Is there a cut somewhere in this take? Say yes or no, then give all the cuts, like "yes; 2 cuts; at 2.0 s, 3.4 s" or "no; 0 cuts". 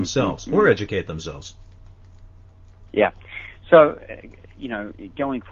no; 0 cuts